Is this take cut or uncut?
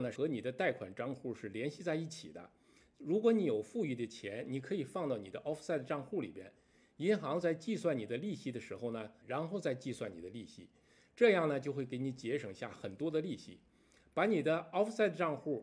cut